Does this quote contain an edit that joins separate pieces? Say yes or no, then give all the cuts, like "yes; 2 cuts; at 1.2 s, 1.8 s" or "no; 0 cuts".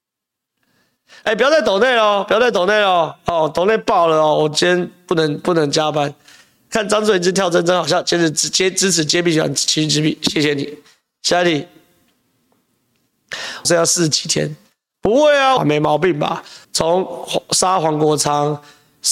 yes; 3 cuts; at 13.6 s, 15.6 s, 16.6 s